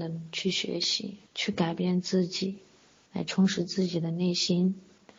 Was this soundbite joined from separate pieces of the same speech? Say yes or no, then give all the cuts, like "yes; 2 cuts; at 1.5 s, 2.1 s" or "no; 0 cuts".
yes; 1 cut; at 1.3 s